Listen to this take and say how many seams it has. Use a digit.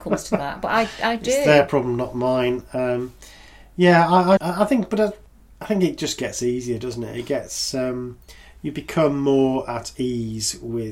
1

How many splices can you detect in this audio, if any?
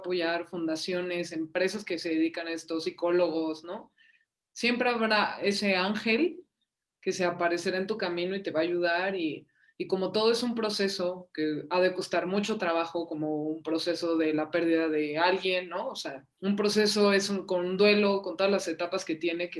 1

